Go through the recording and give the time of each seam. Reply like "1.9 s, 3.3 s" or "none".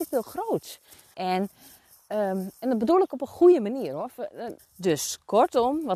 1.1 s, 4.6 s